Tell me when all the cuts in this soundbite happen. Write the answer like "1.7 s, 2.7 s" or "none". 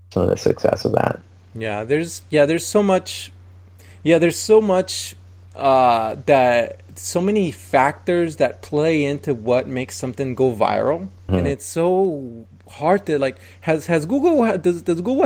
11.3 s